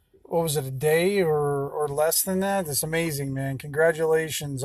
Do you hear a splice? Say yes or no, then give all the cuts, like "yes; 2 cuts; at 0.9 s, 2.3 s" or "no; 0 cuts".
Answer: no; 0 cuts